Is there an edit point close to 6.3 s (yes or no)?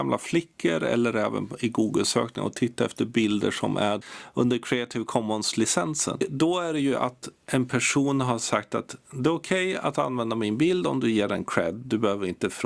no